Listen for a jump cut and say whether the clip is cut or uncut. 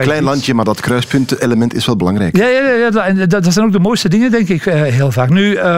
uncut